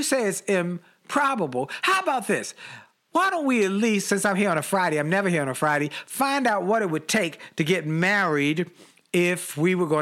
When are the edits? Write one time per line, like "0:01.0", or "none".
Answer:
none

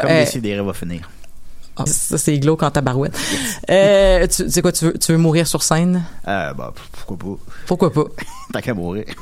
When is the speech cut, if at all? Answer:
0:01.9

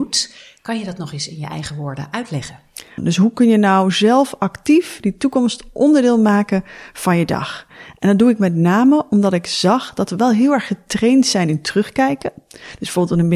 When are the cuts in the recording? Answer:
0:03.0

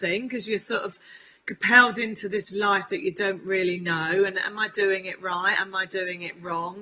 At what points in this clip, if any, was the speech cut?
none

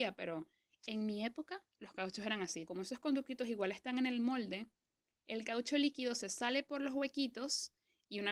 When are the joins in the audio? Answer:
0:02.7

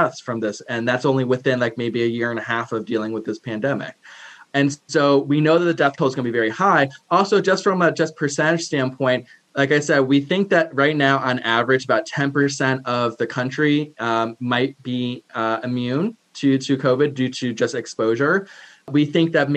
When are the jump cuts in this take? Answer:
none

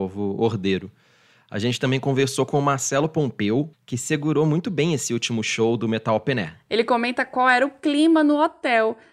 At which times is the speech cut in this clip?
0:03.7

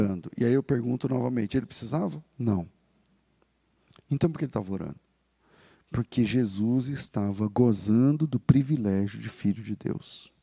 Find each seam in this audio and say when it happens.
none

